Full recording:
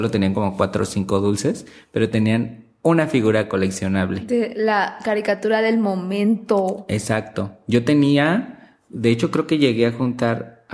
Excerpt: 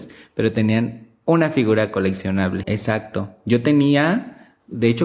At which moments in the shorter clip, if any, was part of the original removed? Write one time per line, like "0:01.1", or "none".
0:02.6